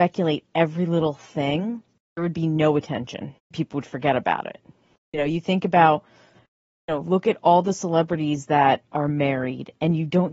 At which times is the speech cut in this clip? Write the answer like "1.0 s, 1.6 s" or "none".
none